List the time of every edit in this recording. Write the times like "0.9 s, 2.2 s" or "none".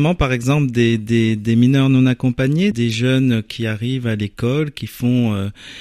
2.7 s